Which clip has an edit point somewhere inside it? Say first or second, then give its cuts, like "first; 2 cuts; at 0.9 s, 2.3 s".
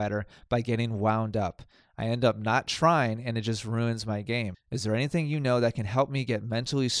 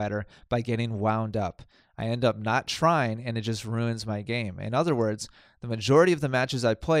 first; 1 cut; at 4.5 s